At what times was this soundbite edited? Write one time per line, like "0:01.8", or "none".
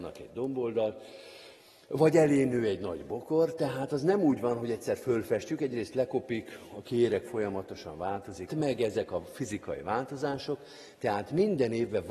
0:08.5